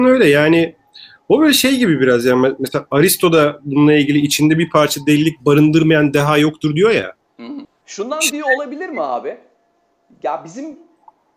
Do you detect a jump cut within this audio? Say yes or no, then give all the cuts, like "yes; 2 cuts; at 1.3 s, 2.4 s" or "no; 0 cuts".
yes; 1 cut; at 7.6 s